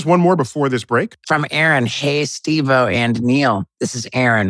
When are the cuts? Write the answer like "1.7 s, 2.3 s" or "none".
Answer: 1.2 s

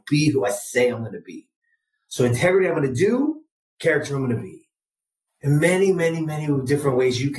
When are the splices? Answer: 5.3 s

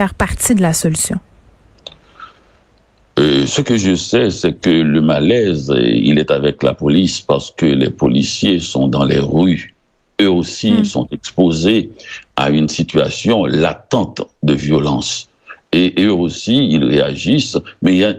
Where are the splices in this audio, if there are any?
none

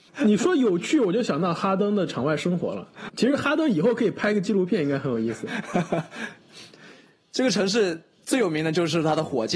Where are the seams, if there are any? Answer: none

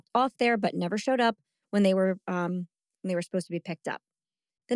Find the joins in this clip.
none

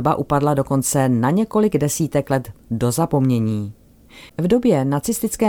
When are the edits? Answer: 4.3 s

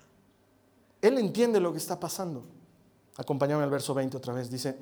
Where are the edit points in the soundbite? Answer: 3.1 s

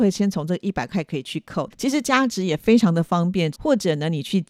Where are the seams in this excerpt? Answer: 1.7 s, 3.5 s

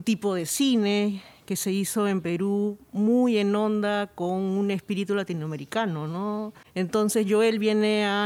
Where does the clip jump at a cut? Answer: 6.6 s

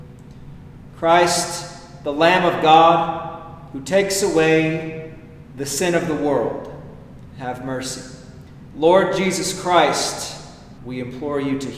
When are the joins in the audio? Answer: 0.9 s, 8.7 s, 10.8 s

